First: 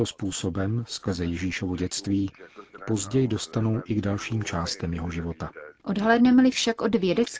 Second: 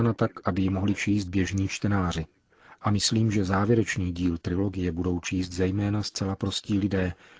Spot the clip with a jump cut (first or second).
first